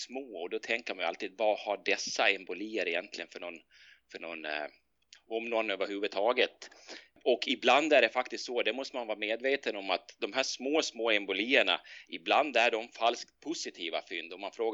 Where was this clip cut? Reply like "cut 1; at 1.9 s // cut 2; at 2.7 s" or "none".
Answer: cut 1; at 5.2 s